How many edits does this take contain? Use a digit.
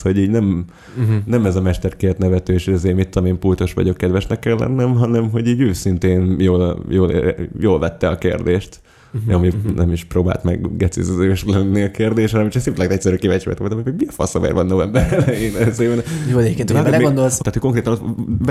1